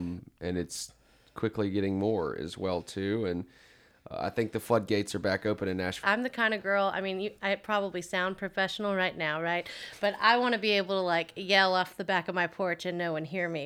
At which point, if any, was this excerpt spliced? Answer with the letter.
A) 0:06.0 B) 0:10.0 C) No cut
A